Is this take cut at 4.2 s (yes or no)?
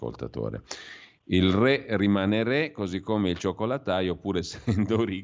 no